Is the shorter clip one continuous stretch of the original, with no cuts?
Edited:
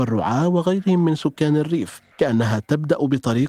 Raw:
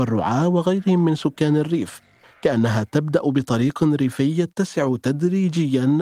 no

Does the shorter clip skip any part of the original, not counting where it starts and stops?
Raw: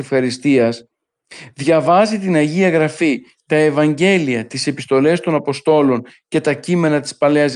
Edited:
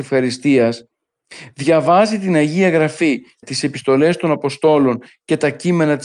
yes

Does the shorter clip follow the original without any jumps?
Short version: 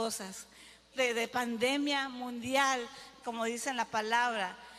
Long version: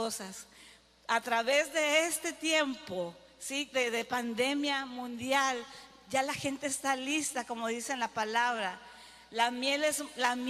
no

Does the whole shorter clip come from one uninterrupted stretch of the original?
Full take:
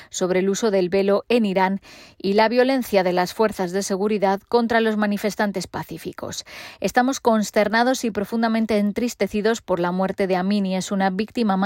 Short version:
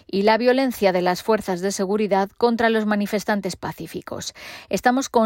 yes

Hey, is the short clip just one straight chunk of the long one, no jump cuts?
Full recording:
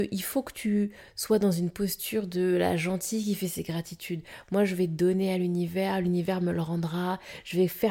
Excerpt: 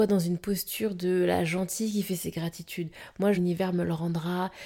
no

